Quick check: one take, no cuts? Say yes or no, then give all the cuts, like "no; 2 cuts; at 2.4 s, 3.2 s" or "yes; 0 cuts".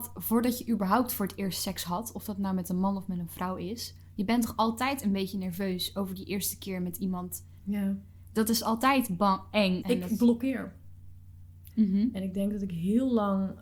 no; 3 cuts; at 7.6 s, 9.8 s, 11.7 s